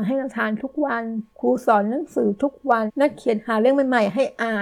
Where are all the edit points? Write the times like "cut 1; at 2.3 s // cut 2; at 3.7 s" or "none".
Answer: cut 1; at 1.3 s // cut 2; at 2.9 s